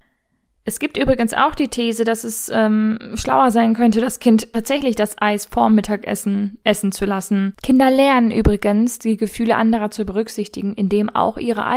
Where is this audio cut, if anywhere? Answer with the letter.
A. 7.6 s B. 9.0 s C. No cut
A